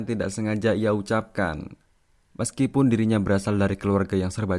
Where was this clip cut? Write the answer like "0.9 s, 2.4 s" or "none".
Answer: 2.3 s